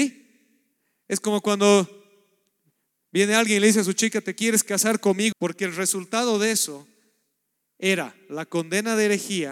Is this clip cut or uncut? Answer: cut